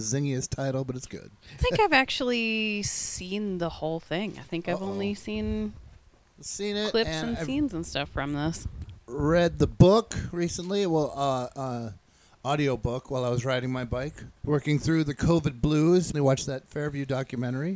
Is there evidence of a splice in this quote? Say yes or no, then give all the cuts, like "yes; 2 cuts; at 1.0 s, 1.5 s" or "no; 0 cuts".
yes; 3 cuts; at 1.6 s, 14.4 s, 16.1 s